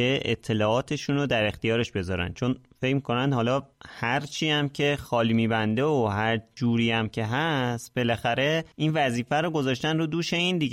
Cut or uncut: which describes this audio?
cut